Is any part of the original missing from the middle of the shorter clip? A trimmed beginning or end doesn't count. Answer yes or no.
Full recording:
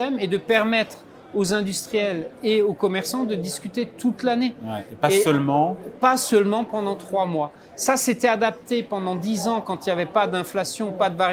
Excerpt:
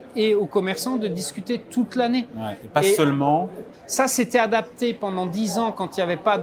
yes